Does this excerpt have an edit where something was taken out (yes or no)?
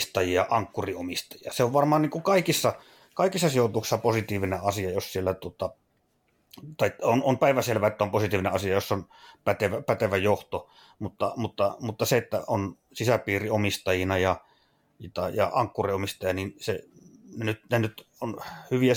no